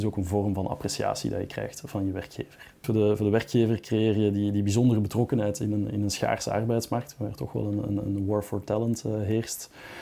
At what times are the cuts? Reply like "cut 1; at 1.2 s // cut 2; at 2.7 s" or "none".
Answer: none